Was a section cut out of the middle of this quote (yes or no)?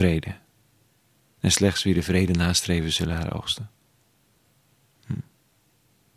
no